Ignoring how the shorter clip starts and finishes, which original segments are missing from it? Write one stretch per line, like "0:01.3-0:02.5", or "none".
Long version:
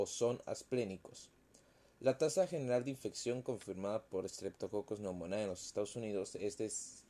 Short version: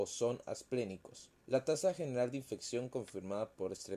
0:01.4-0:01.9

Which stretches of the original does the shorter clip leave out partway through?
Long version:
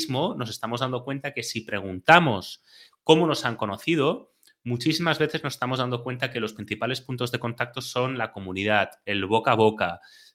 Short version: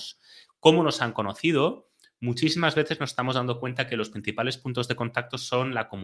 none

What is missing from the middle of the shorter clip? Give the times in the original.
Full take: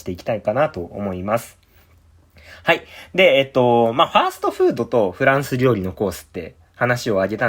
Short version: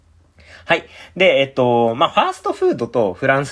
none

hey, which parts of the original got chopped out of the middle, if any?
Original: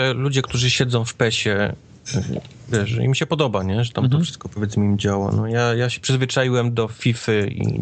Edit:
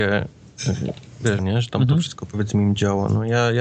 0:02.9-0:03.6

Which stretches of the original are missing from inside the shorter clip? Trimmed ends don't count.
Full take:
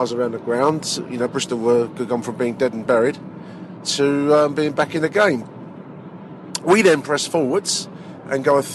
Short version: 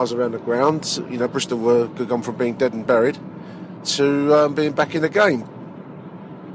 none

